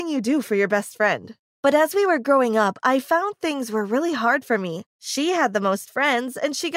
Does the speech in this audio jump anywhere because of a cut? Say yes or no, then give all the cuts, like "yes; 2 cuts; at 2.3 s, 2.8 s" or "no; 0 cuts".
yes; 1 cut; at 4.9 s